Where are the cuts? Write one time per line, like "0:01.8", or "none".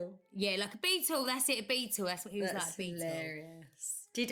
none